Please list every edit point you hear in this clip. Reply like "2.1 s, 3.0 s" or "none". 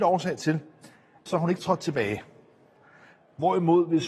1.3 s